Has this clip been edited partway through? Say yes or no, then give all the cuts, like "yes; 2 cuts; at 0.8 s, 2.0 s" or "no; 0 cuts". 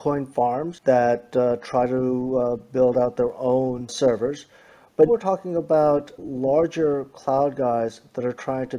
yes; 1 cut; at 5.1 s